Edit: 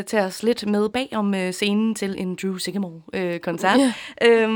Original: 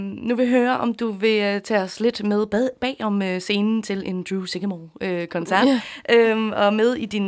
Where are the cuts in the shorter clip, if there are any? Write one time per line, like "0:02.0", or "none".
0:00.9

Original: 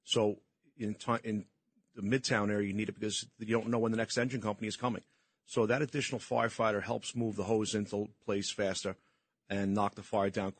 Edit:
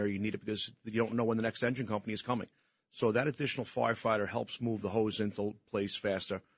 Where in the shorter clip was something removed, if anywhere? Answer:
none

